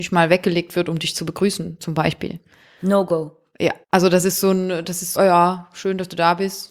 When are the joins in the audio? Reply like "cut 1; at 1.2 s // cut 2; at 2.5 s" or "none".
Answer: cut 1; at 3.8 s // cut 2; at 5.1 s